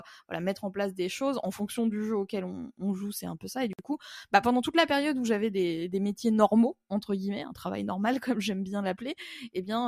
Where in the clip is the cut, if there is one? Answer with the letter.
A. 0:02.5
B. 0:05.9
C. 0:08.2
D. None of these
D